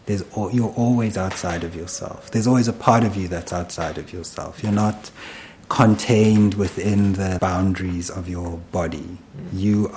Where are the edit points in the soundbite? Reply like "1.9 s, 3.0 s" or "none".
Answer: 5.6 s, 7.4 s